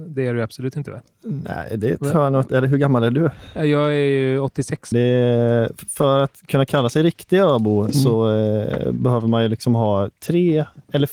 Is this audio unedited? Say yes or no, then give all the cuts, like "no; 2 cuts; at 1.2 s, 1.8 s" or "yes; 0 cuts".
no; 1 cut; at 4.9 s